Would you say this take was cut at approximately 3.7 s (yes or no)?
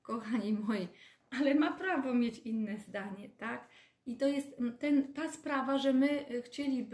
no